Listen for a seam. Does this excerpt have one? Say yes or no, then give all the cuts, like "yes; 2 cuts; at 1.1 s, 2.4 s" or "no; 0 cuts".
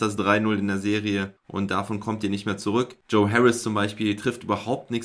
yes; 1 cut; at 3.0 s